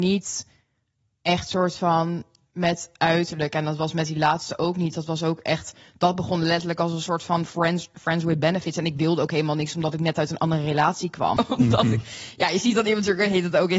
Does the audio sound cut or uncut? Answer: cut